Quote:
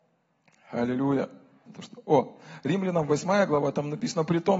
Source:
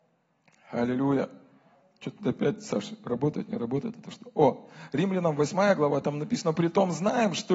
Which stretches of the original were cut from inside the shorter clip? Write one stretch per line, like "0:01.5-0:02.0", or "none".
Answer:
0:01.7-0:03.9